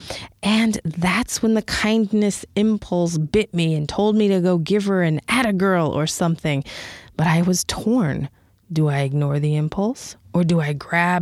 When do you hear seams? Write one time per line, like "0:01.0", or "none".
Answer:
none

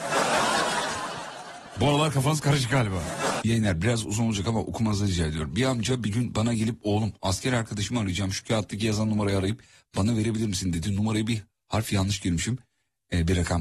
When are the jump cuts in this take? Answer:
0:03.4

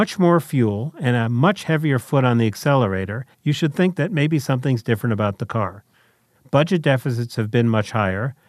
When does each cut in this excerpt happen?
0:03.3
0:06.4

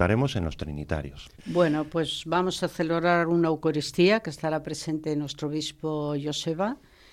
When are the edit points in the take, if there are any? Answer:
0:01.4

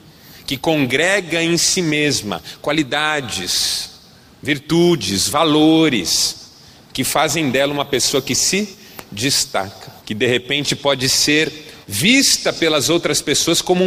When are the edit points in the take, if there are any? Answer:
0:10.0
0:11.8

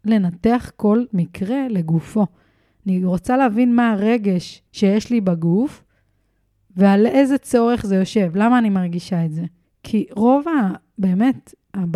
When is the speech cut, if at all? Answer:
0:04.7
0:09.6

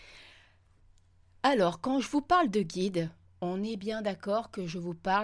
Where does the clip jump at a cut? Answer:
none

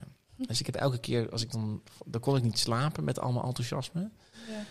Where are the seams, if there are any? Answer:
none

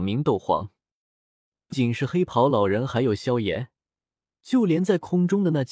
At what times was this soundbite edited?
0:01.7

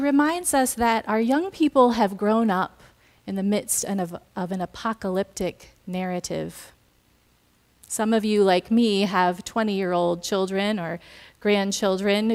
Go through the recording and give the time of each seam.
none

